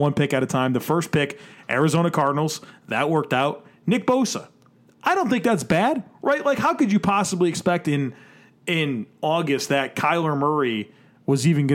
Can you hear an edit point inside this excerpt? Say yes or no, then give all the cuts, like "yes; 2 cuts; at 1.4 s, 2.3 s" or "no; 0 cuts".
no; 0 cuts